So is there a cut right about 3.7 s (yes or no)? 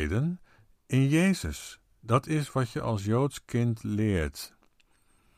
no